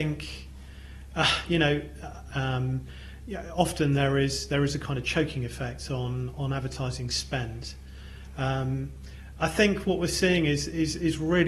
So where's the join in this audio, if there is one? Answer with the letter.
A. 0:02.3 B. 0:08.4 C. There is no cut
A